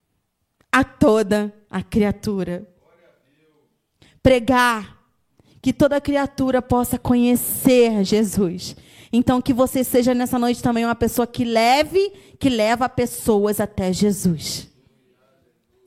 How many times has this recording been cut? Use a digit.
0